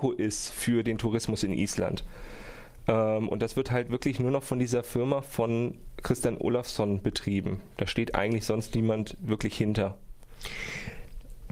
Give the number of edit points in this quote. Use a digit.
0